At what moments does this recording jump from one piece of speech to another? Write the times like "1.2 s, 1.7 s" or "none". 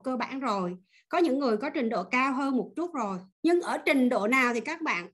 3.3 s